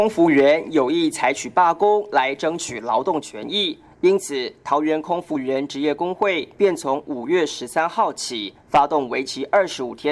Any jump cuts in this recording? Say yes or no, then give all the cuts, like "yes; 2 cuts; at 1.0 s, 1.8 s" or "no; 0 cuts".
no; 0 cuts